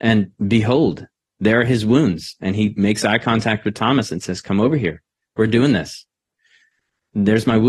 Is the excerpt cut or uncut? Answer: uncut